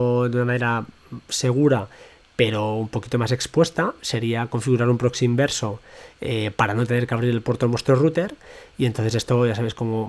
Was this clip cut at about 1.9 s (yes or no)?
no